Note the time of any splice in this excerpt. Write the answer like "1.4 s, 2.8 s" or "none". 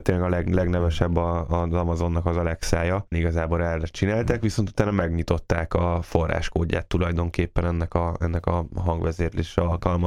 3.1 s